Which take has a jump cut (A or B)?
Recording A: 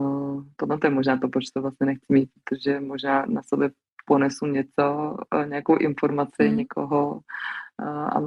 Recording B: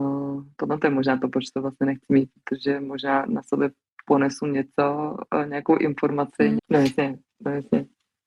B